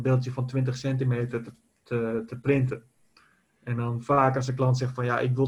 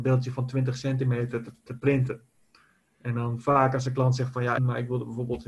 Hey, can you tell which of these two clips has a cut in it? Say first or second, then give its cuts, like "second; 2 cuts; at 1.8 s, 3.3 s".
second; 2 cuts; at 1.7 s, 4.6 s